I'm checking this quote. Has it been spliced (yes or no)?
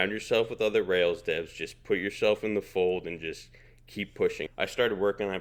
yes